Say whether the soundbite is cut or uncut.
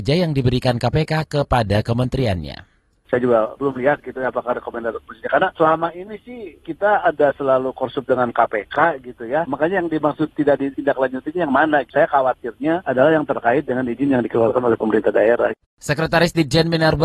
cut